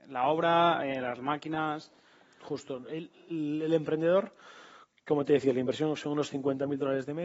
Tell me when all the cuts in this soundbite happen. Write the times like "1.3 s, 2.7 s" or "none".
none